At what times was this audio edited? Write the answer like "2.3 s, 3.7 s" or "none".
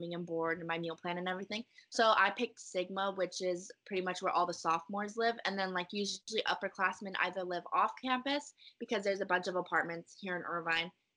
none